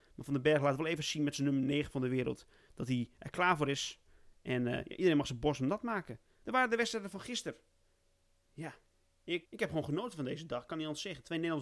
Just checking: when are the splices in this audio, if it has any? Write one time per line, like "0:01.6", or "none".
0:06.4
0:09.5